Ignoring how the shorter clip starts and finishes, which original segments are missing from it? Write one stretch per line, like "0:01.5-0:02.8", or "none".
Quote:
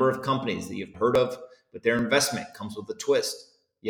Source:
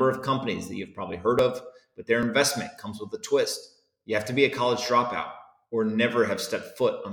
0:00.9-0:01.2